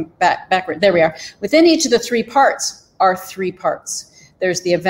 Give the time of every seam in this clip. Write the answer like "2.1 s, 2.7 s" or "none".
none